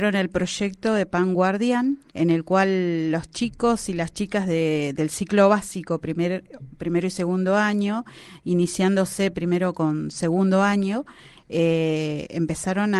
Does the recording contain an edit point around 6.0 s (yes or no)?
no